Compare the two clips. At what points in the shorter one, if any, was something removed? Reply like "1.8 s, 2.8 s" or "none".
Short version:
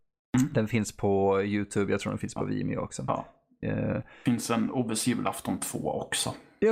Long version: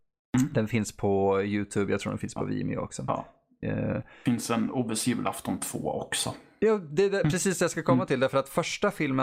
none